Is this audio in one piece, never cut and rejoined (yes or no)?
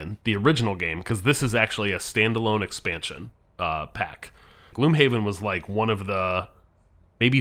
no